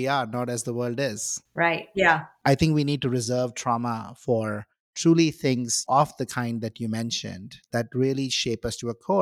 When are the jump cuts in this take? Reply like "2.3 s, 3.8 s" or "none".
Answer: 1.9 s